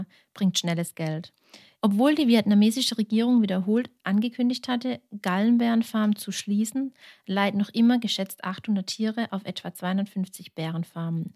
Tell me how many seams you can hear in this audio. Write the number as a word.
one